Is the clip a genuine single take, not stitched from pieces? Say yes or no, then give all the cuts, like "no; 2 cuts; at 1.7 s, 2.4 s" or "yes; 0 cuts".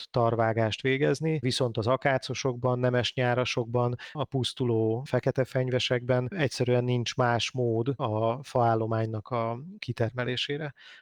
no; 1 cut; at 4.1 s